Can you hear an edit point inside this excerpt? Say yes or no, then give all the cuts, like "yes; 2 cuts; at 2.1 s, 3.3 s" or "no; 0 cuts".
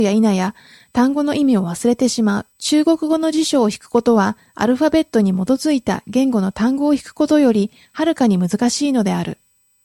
yes; 1 cut; at 2.5 s